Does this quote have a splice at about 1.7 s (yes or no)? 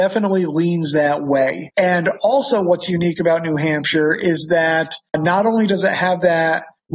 yes